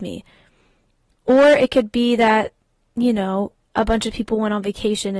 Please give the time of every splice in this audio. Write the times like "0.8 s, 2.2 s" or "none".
none